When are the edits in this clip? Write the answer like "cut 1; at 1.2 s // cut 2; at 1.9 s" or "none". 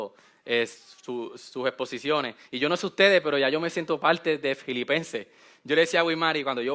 none